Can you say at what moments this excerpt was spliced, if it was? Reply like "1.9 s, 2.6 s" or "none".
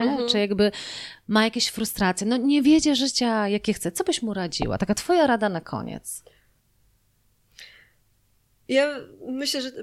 none